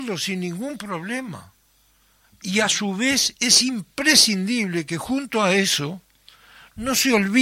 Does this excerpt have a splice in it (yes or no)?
no